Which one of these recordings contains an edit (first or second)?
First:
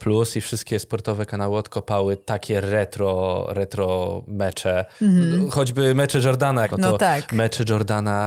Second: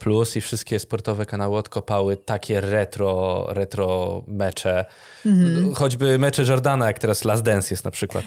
first